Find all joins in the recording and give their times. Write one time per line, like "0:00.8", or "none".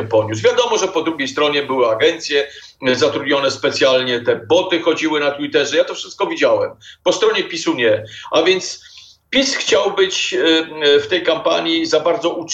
none